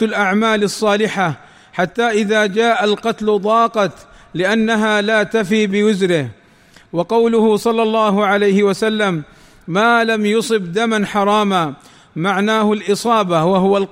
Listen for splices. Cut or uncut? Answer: uncut